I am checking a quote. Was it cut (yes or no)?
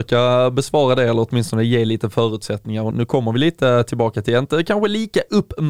yes